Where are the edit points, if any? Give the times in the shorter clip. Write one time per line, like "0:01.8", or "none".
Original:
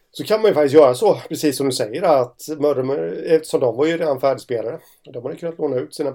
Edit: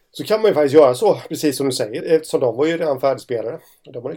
0:02.0